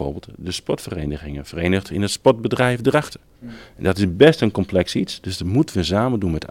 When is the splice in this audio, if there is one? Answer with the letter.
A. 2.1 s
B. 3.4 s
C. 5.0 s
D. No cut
B